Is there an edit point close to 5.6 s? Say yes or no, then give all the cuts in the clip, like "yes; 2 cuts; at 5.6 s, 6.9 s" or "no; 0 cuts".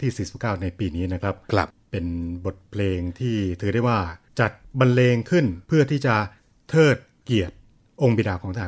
yes; 1 cut; at 5.6 s